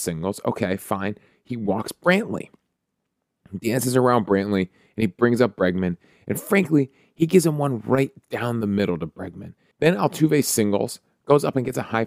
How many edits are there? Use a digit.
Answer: 1